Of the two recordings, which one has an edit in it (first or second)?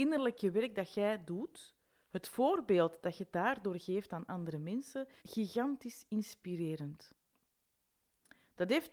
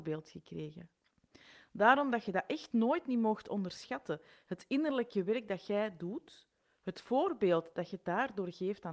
first